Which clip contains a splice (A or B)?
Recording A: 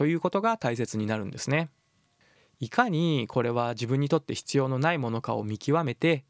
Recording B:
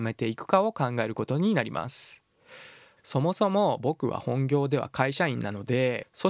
B